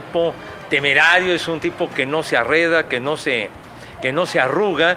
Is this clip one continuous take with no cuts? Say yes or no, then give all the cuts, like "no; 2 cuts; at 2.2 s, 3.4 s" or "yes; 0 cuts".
yes; 0 cuts